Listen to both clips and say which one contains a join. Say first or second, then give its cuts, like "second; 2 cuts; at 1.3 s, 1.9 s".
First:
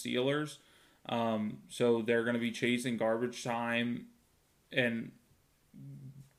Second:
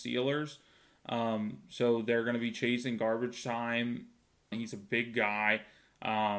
second; 1 cut; at 4.5 s